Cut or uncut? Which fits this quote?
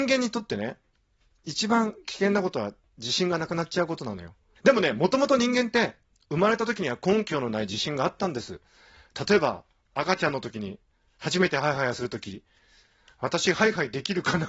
cut